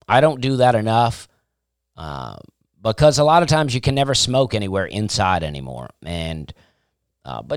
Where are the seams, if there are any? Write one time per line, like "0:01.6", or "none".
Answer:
none